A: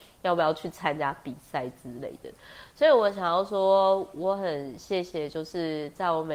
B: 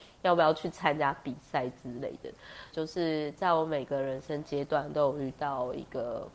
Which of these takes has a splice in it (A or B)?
B